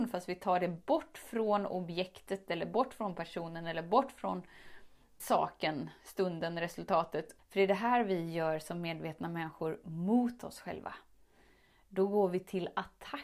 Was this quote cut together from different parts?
yes; 2 cuts; at 5.2 s, 7.4 s

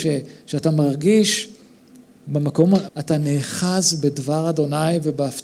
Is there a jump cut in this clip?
yes; 1 cut; at 2.9 s

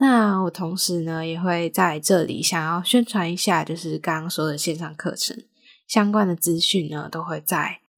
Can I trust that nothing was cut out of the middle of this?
yes; 0 cuts

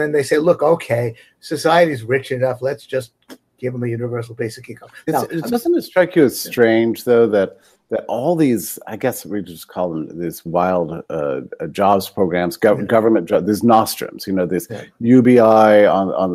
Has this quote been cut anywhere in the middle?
no; 0 cuts

